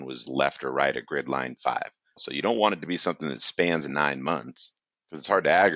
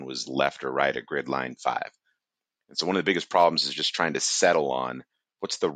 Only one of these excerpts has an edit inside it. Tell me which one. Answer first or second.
first